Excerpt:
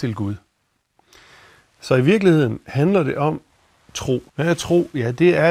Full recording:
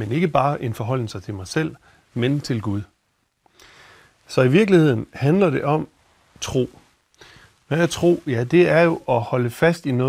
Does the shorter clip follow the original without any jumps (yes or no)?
no